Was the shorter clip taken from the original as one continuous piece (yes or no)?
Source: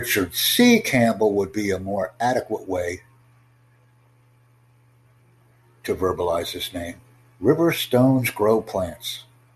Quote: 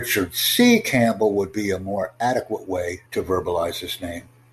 no